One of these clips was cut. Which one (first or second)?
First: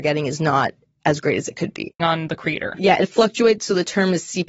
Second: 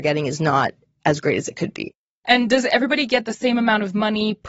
first